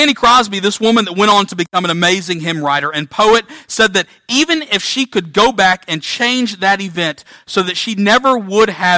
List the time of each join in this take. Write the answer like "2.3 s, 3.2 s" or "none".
none